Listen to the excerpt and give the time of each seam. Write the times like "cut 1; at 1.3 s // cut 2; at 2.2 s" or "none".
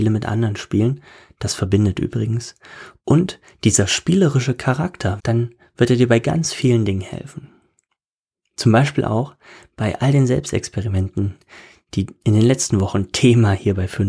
cut 1; at 5.2 s